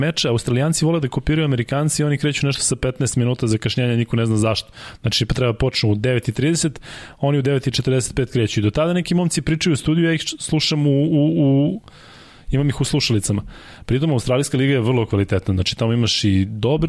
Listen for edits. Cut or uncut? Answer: uncut